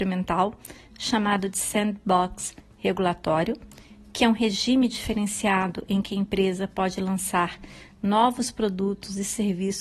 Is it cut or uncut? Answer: uncut